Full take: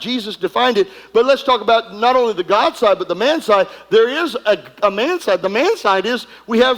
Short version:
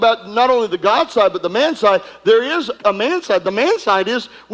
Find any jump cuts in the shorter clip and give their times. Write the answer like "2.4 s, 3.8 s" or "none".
2.8 s